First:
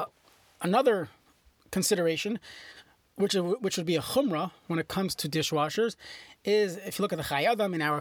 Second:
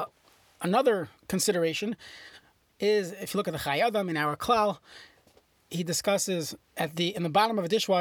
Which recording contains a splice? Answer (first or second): second